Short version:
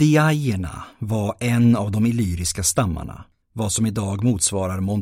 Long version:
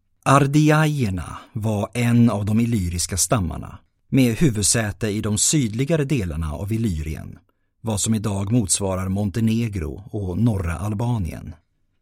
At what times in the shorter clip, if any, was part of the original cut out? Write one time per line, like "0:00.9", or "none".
0:03.4